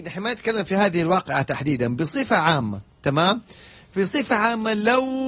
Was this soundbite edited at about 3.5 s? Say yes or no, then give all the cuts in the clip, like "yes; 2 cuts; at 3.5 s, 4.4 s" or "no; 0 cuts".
no; 0 cuts